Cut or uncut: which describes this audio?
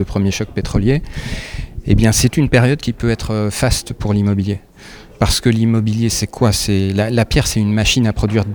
uncut